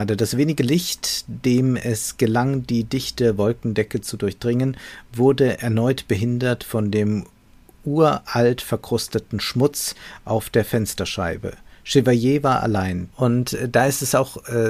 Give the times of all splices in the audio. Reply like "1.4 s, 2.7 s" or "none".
13.1 s